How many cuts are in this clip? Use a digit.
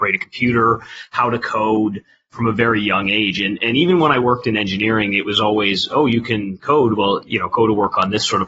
0